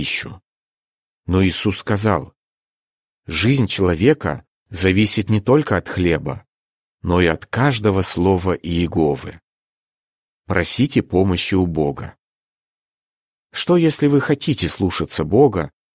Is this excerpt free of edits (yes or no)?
no